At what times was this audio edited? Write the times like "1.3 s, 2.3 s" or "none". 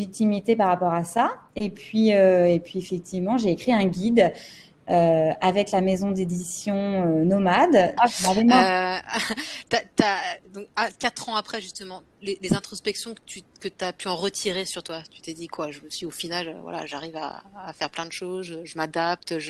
8.0 s